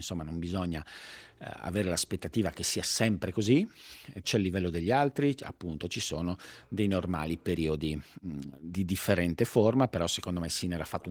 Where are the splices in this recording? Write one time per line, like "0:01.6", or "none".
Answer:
0:04.2